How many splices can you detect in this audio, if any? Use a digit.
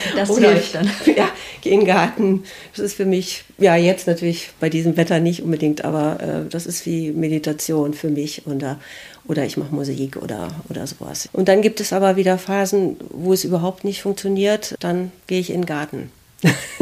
1